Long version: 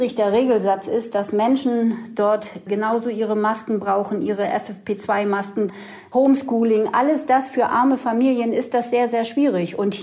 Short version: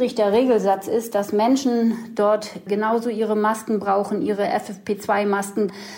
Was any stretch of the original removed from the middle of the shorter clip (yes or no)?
no